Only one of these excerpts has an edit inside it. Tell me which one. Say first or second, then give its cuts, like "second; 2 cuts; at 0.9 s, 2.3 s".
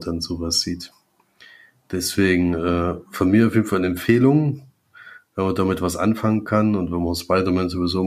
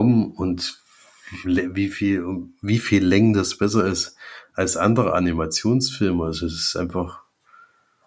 second; 1 cut; at 1.4 s